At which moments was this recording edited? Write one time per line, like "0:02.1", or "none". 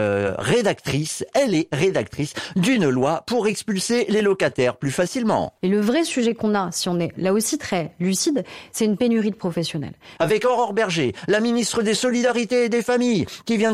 0:10.2